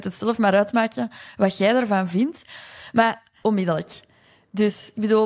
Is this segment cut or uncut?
cut